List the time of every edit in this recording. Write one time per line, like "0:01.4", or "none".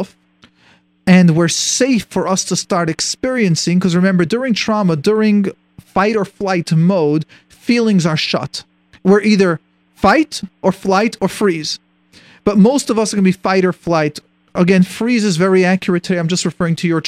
none